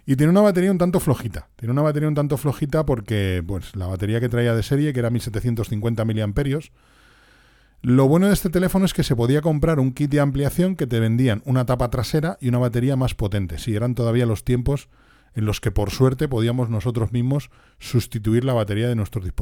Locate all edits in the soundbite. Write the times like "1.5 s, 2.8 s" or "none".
none